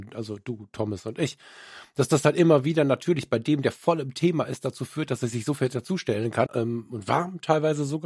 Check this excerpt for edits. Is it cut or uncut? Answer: cut